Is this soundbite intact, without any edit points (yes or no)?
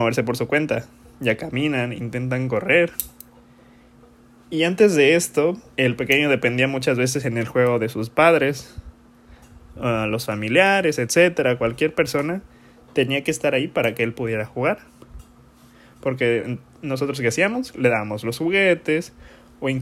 no